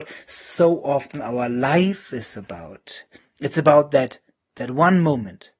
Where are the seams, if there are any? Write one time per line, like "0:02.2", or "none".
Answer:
none

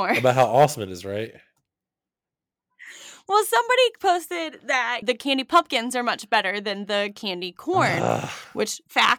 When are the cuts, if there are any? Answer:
0:05.0

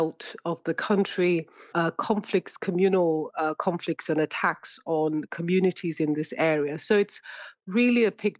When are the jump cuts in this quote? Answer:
0:01.7

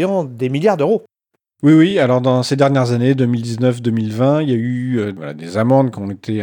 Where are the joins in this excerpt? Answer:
none

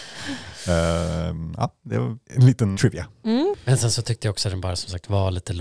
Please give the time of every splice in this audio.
0:02.7

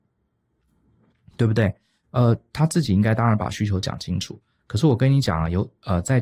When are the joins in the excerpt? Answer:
none

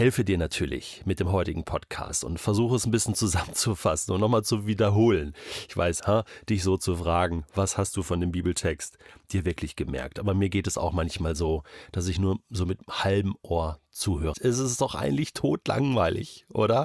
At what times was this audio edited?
0:06.0
0:14.3

